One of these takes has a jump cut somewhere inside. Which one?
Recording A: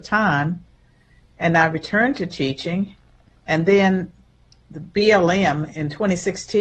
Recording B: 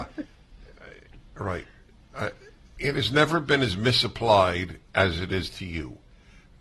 B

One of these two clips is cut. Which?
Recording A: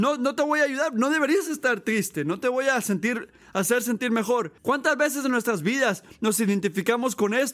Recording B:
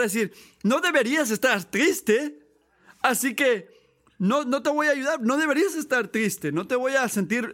A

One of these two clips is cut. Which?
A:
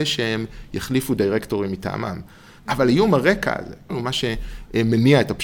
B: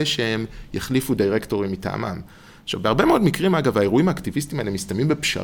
A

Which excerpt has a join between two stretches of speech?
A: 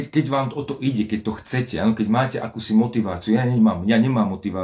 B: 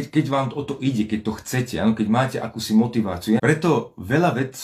B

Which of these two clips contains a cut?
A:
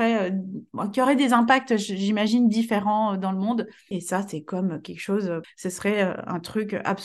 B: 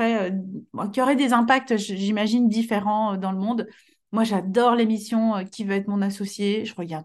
A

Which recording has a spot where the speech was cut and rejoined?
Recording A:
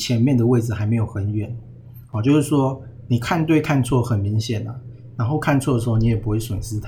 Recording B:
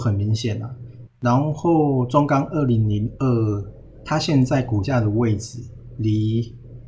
B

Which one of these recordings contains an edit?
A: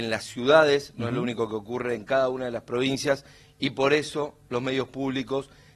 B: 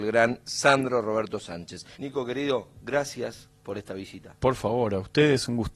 B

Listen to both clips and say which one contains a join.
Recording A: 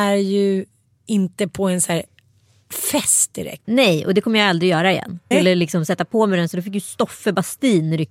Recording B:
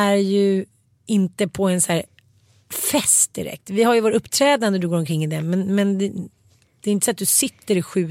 A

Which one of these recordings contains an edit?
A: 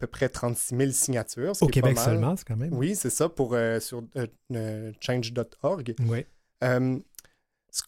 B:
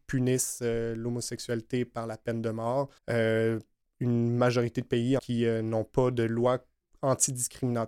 B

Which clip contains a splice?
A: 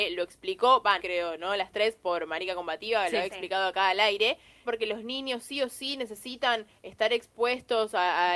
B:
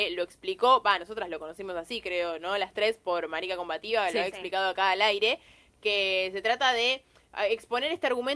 A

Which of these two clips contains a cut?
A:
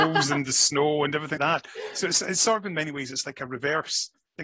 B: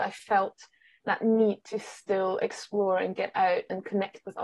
A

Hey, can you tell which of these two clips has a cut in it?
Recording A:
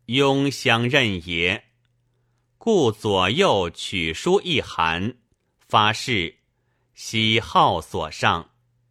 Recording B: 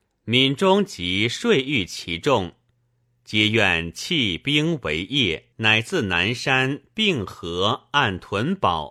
B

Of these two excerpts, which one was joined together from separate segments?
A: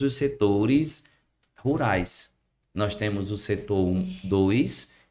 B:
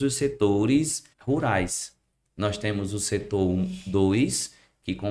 B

